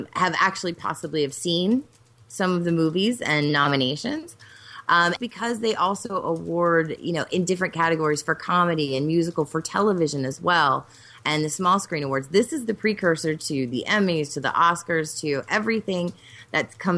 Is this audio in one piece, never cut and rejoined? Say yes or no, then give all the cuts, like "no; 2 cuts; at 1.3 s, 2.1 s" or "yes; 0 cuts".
no; 1 cut; at 5.2 s